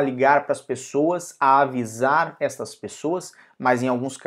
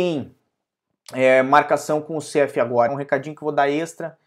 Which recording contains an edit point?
second; 1 cut; at 2.9 s

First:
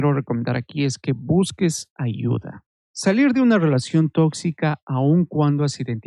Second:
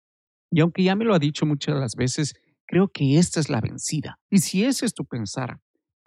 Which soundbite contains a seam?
second; 1 cut; at 4.3 s

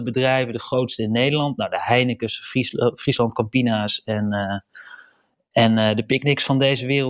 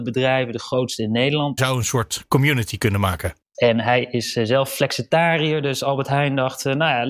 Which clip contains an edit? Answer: second; 2 cuts; at 1.6 s, 3.5 s

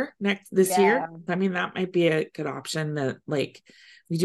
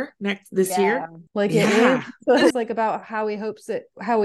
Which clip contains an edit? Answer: second; 2 cuts; at 1.3 s, 2.5 s

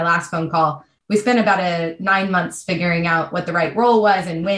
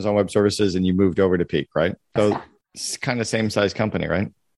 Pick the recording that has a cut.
second; 1 cut; at 2.2 s

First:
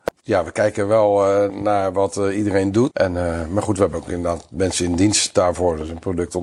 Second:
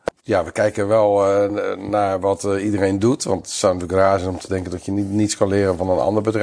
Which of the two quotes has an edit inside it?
first; 2 cuts; at 1.5 s, 2.9 s

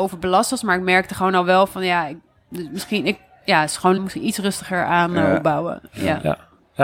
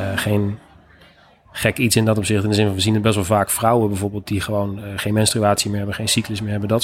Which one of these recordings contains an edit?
first; 1 cut; at 4.0 s

